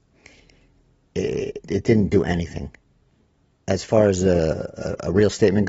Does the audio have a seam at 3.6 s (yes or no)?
no